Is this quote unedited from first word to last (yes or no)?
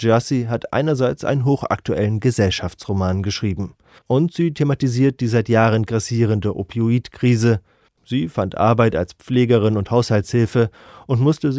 no